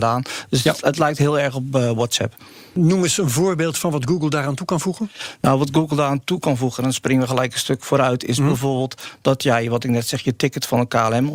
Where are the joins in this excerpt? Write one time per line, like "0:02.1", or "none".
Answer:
none